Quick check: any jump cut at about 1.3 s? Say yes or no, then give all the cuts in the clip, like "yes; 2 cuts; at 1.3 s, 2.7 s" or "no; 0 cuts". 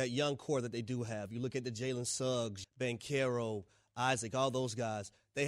no; 1 cut; at 2.6 s